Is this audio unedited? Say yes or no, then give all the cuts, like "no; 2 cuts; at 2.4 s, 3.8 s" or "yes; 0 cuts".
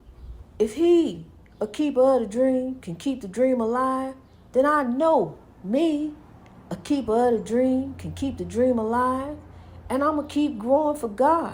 yes; 0 cuts